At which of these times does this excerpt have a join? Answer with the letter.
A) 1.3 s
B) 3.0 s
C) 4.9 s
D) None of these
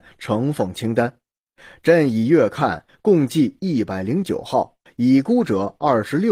C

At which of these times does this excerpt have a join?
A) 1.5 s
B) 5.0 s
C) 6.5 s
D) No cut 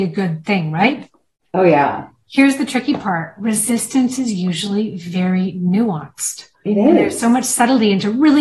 C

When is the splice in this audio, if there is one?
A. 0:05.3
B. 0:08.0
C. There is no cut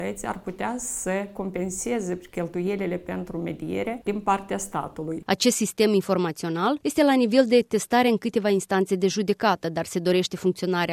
A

